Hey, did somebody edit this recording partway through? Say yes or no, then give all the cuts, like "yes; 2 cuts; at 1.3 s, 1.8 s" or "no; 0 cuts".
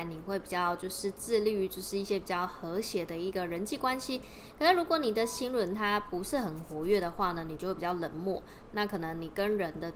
no; 0 cuts